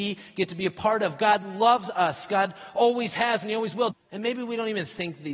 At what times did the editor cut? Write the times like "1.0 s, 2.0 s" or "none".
3.9 s